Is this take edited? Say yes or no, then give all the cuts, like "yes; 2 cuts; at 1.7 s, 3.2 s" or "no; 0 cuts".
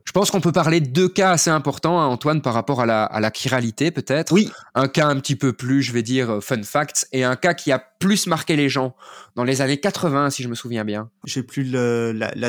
yes; 1 cut; at 11.2 s